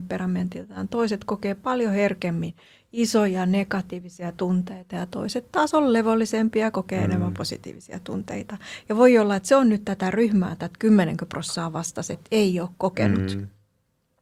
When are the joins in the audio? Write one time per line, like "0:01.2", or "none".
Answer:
none